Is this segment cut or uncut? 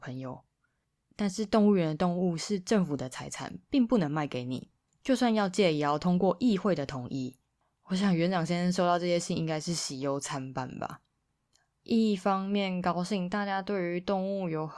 uncut